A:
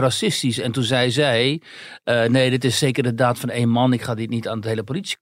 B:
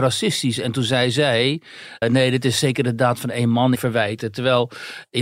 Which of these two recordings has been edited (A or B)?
B